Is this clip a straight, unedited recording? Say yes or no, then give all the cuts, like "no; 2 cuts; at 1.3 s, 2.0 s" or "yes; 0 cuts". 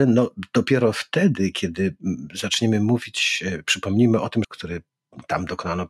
no; 1 cut; at 4.4 s